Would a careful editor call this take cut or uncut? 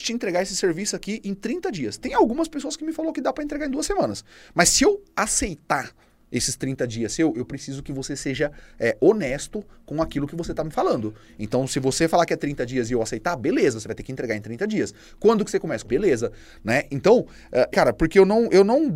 cut